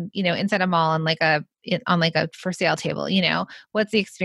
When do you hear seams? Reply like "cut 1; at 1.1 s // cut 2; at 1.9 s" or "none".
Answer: none